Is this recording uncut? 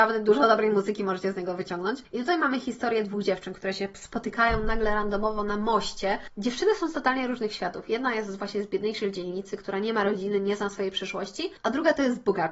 yes; 0 cuts

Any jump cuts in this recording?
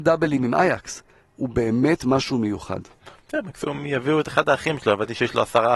yes; 1 cut; at 1.3 s

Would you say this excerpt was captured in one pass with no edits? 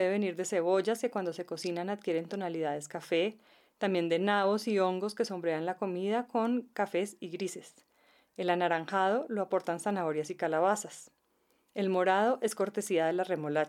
yes; 0 cuts

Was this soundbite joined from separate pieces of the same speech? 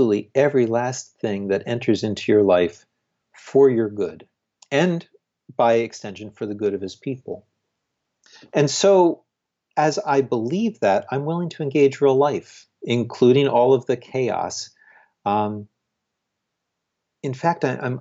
no; 0 cuts

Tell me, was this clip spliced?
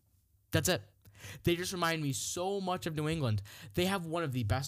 no; 0 cuts

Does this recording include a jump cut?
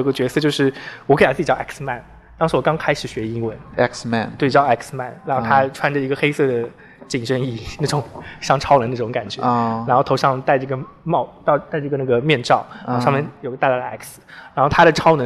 no; 0 cuts

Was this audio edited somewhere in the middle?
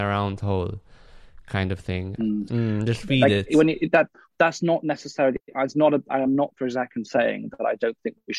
yes; 1 cut; at 2.5 s

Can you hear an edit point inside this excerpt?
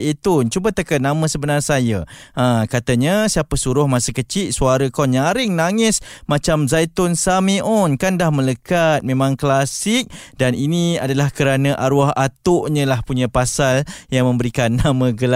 no; 0 cuts

